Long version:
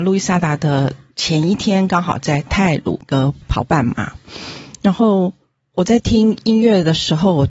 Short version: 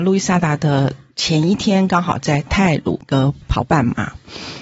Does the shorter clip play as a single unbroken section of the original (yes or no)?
yes